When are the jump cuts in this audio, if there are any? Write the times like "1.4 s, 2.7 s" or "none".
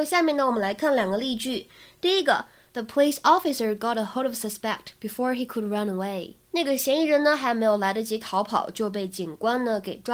none